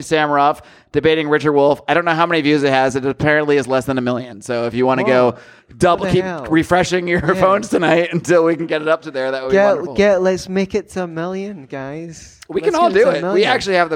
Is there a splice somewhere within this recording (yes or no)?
no